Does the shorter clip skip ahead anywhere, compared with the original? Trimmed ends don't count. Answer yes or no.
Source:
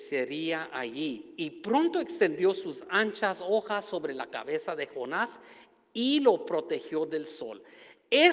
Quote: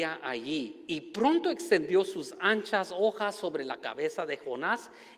no